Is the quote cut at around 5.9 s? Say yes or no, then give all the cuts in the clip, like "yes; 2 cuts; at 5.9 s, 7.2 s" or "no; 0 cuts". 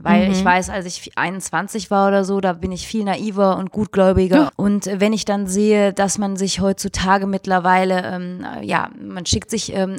no; 1 cut; at 4.5 s